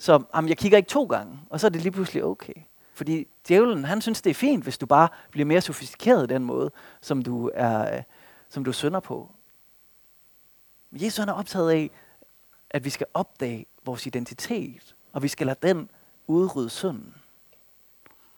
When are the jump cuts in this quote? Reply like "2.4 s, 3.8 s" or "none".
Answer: 2.9 s